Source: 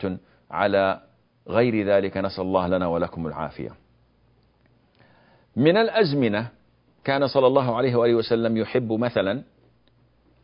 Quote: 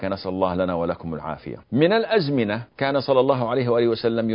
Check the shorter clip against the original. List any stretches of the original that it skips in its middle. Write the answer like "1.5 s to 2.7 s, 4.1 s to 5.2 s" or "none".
3.8 s to 5.5 s, 6.5 s to 7.0 s